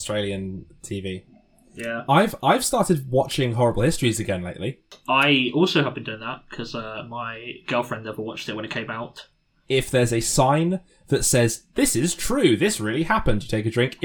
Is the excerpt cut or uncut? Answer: cut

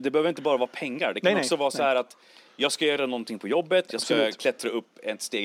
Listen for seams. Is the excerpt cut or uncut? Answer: uncut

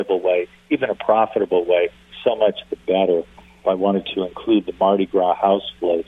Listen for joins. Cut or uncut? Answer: cut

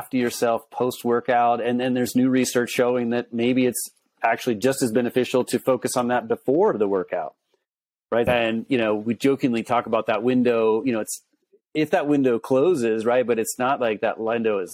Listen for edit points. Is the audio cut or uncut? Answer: cut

